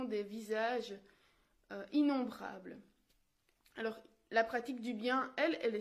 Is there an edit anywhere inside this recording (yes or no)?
no